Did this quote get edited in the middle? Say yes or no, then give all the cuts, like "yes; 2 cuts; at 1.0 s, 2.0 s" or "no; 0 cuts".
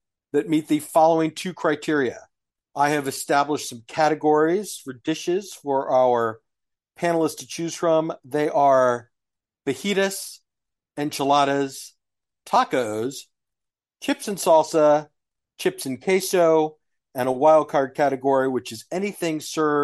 yes; 1 cut; at 2.6 s